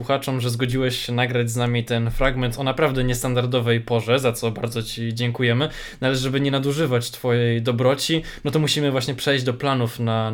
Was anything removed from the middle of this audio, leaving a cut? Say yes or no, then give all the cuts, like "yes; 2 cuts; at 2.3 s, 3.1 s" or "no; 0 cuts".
no; 0 cuts